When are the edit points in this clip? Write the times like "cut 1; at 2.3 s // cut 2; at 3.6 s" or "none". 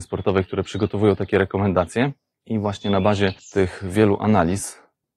cut 1; at 2.3 s